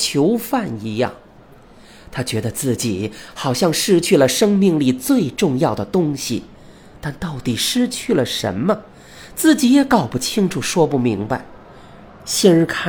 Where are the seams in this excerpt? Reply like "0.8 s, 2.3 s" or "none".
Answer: none